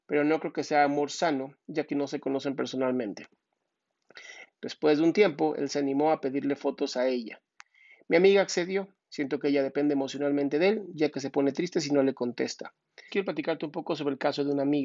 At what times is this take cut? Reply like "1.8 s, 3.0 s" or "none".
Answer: 4.5 s, 13.1 s